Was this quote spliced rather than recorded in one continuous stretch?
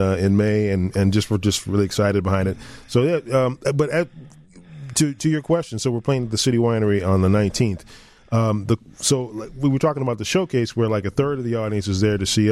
no; 0 cuts

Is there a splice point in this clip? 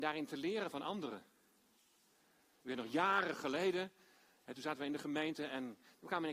no; 0 cuts

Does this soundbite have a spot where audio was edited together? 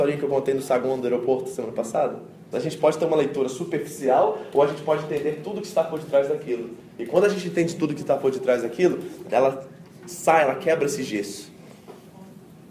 yes; 2 cuts; at 2.5 s, 9.2 s

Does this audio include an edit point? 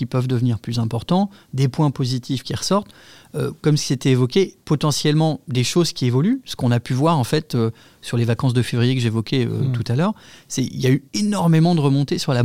no; 0 cuts

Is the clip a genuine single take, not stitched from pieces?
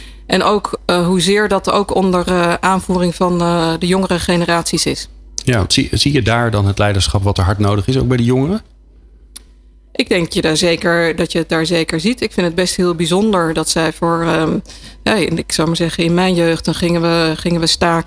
yes; 0 cuts

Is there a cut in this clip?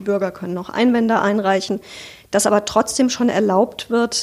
no; 0 cuts

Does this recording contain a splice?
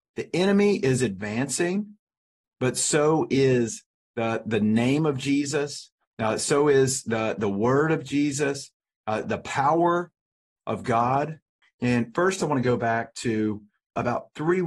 yes; 2 cuts; at 9.2 s, 11.6 s

